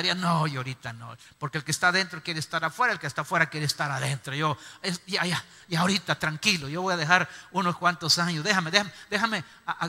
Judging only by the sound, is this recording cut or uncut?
uncut